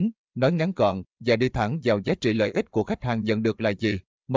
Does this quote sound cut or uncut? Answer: cut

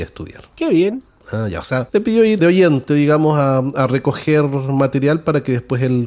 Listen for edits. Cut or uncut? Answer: cut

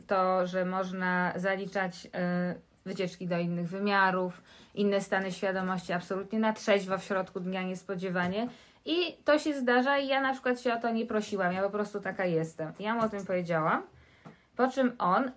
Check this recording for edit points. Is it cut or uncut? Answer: uncut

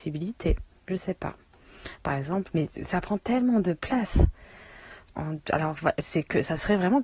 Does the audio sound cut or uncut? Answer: cut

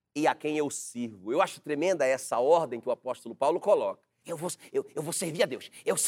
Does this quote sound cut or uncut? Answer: cut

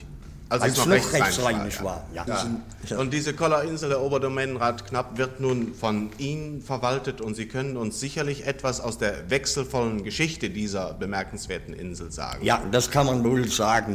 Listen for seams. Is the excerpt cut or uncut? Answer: cut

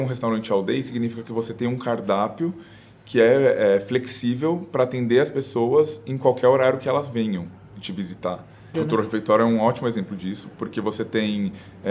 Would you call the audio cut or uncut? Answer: cut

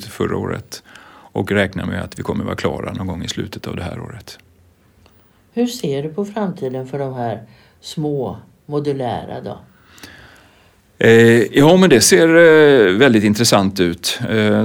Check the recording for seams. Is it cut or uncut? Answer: uncut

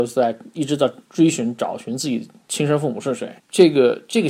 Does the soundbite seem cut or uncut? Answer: cut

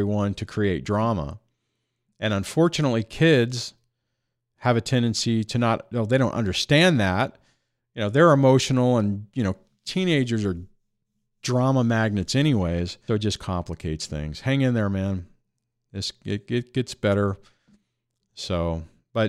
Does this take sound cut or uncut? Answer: cut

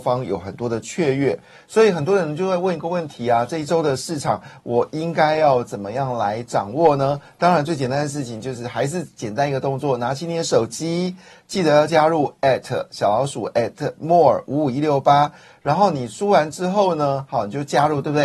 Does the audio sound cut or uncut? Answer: uncut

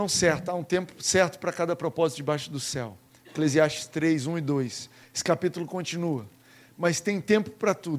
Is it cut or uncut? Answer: cut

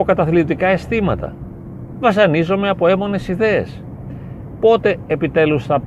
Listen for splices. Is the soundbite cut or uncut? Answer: uncut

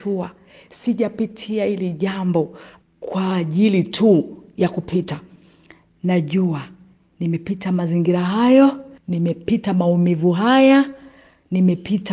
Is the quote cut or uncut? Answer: cut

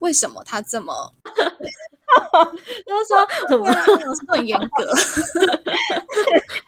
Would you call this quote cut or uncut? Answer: cut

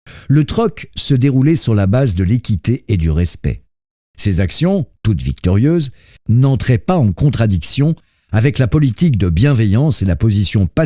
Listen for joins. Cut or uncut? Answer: cut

